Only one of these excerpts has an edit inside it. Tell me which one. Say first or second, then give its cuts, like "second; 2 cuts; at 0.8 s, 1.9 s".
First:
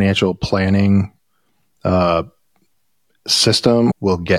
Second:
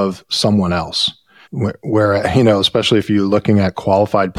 second; 1 cut; at 1.5 s